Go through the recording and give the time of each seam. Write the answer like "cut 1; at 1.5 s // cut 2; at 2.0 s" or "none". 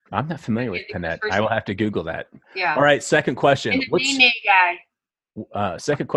cut 1; at 2.4 s